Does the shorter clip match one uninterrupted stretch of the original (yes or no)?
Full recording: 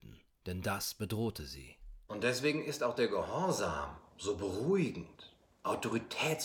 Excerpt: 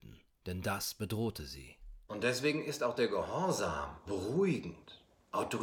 no